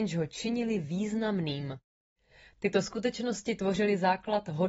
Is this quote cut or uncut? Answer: uncut